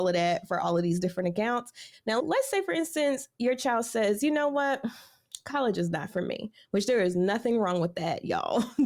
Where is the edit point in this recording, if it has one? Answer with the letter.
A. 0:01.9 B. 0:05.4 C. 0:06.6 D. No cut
A